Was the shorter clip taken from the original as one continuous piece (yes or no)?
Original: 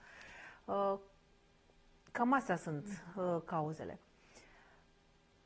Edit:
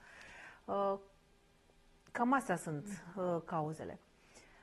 yes